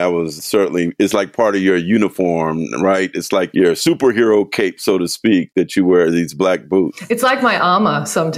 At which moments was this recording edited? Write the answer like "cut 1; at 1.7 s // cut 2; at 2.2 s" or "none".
none